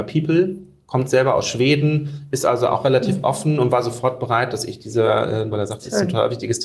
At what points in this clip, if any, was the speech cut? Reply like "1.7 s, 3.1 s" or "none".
5.5 s